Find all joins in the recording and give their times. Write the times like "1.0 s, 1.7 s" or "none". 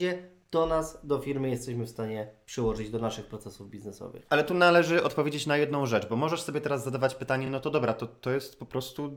none